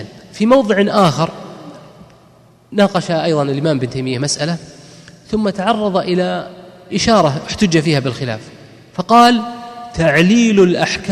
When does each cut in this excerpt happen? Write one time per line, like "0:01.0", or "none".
none